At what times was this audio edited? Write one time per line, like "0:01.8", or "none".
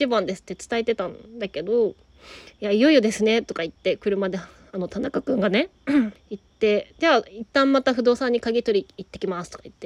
0:06.2